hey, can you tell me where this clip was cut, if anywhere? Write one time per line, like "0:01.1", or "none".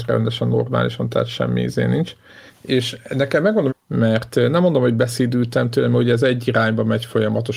0:02.5
0:03.7